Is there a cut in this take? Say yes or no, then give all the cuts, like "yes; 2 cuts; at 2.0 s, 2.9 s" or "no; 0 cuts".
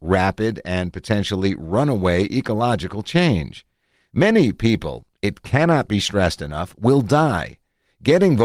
no; 0 cuts